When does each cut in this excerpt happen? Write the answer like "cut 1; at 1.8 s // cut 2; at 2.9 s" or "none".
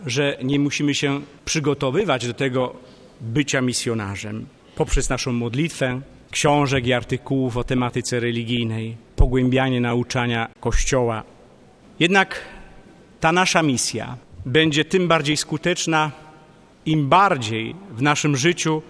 cut 1; at 6.3 s